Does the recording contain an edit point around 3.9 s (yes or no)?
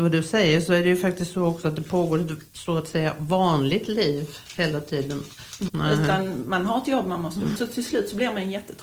no